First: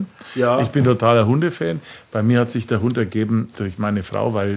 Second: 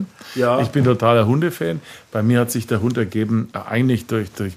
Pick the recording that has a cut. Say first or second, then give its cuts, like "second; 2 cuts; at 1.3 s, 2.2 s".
first; 1 cut; at 3.5 s